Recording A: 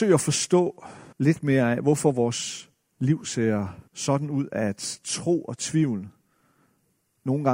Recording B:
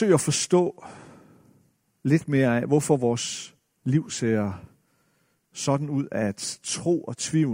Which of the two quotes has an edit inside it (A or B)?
A